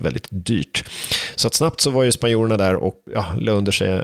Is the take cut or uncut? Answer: uncut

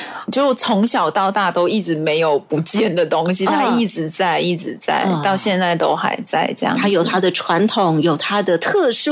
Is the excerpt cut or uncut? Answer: uncut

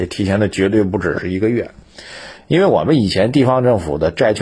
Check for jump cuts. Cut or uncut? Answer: uncut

